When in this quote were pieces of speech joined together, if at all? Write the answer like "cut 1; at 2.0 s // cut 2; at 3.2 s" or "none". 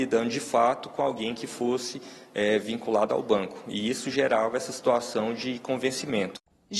none